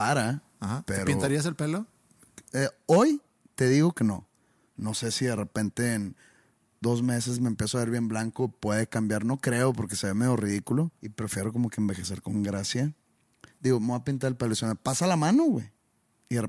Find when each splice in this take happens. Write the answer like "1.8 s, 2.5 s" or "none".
11.0 s, 13.5 s